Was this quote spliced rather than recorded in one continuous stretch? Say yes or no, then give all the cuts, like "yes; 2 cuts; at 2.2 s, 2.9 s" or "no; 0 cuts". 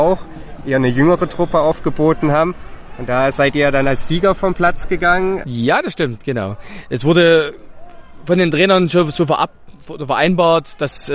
yes; 1 cut; at 5.4 s